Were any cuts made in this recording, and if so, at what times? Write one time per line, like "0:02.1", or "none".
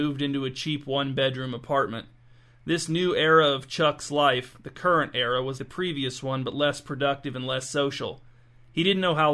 0:05.6